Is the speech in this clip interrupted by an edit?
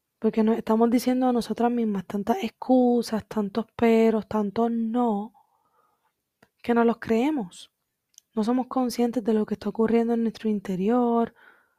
no; 0 cuts

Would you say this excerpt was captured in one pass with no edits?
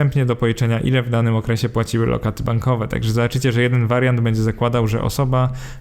yes; 0 cuts

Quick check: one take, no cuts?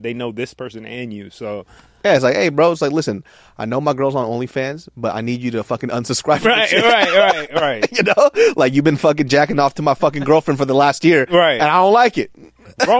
yes; 0 cuts

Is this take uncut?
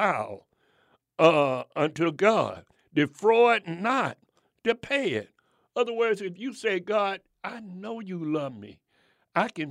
yes; 0 cuts

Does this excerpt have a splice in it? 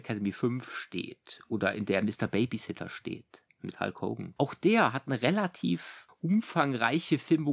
yes; 1 cut; at 4.4 s

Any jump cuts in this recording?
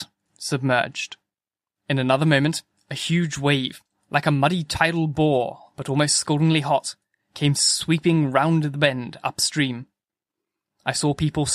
yes; 1 cut; at 1.8 s

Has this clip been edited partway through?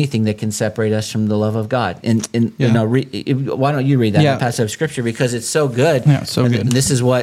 no; 0 cuts

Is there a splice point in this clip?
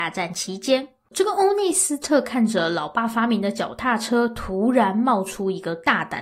yes; 1 cut; at 1.1 s

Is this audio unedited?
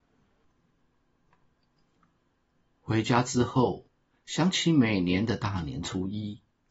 yes; 0 cuts

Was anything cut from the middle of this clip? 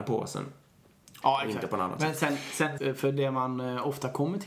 yes; 2 cuts; at 1.2 s, 2.8 s

